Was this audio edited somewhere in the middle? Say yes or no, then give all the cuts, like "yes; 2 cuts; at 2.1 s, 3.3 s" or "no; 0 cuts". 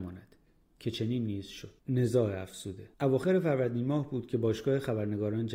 yes; 2 cuts; at 1.8 s, 2.9 s